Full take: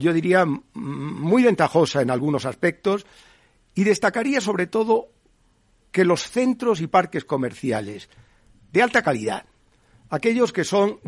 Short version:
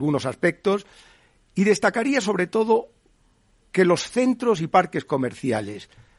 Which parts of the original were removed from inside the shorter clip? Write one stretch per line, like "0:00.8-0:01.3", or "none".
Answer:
none